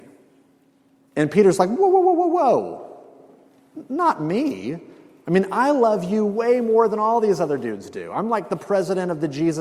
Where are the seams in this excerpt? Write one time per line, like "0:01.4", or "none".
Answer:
none